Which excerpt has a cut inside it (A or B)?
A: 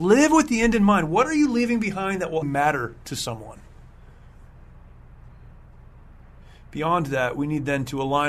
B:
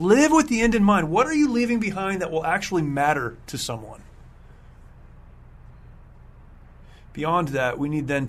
A